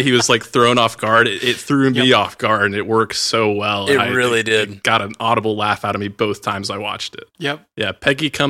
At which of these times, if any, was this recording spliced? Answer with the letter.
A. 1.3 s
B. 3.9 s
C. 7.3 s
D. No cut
C